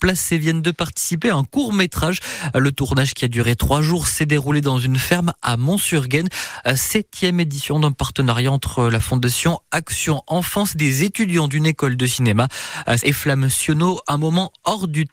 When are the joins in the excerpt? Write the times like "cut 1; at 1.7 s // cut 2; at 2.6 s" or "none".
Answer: cut 1; at 13.0 s